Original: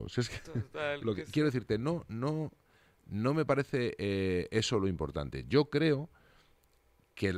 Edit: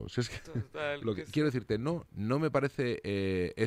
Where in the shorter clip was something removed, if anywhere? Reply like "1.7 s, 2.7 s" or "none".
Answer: 2.1 s